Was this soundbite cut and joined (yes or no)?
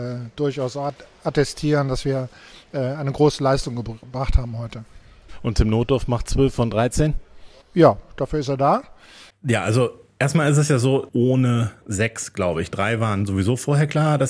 yes